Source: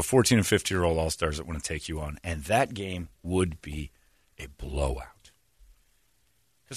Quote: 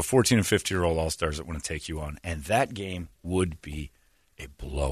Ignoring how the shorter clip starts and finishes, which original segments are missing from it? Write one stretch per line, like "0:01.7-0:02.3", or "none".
none